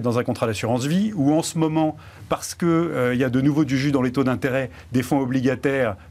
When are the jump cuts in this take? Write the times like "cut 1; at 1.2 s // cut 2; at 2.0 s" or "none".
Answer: none

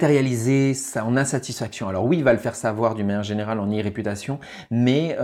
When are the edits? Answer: none

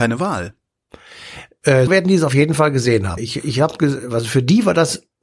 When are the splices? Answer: cut 1; at 1.9 s // cut 2; at 3.2 s

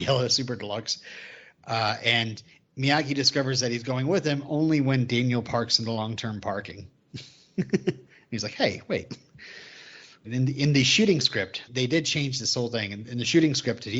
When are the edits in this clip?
cut 1; at 10.2 s // cut 2; at 11.7 s

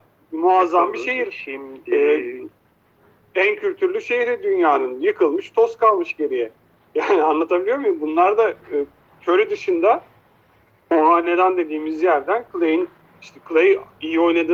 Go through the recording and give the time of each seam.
none

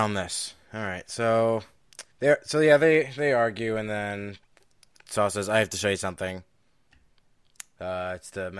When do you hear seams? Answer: cut 1; at 2.1 s

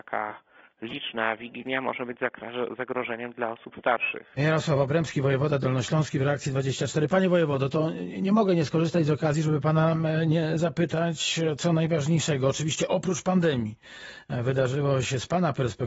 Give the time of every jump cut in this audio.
cut 1; at 4.4 s

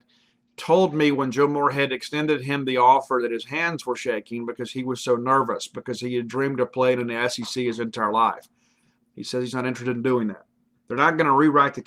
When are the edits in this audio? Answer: cut 1; at 9.0 s // cut 2; at 10.7 s

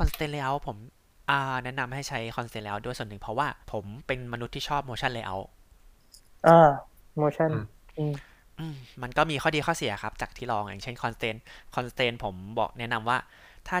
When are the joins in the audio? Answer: cut 1; at 3.6 s

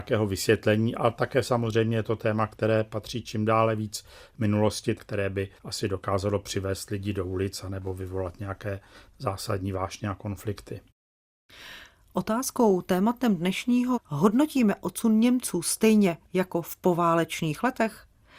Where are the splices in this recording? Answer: cut 1; at 5.0 s // cut 2; at 13.9 s

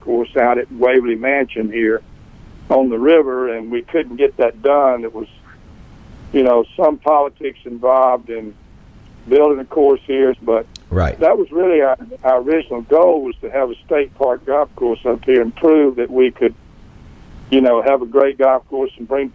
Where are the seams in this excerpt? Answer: cut 1; at 10.3 s

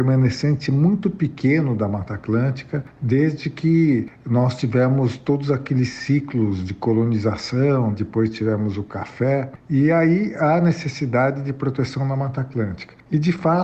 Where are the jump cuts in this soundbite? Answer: cut 1; at 7.9 s

